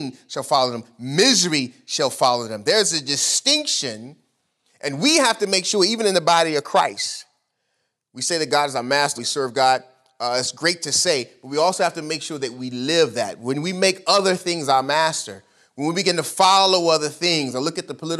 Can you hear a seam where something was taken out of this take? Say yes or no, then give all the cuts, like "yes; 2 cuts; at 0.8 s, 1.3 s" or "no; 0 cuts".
yes; 1 cut; at 9.2 s